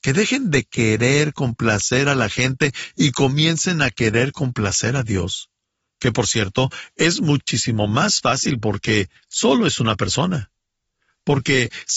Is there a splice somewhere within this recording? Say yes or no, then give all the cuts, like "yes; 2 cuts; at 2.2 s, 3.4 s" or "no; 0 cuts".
no; 0 cuts